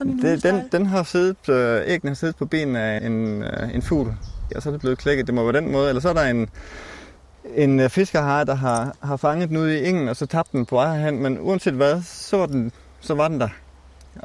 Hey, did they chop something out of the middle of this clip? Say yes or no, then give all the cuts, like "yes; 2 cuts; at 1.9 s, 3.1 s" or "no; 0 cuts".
yes; 2 cuts; at 3.0 s, 4.5 s